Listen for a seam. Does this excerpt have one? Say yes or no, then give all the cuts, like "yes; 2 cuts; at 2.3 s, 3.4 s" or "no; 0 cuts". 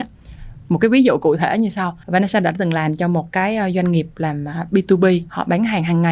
yes; 1 cut; at 2.0 s